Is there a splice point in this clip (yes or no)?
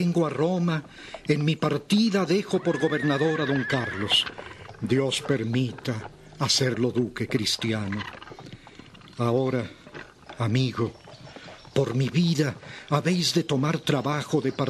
no